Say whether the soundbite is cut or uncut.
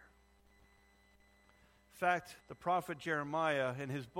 cut